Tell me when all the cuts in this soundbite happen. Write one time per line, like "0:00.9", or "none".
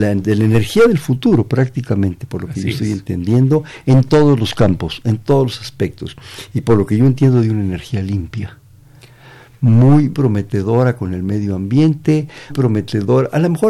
0:10.1
0:12.5